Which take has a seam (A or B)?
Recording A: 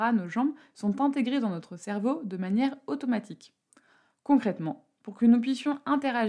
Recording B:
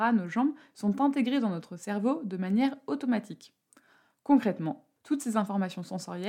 B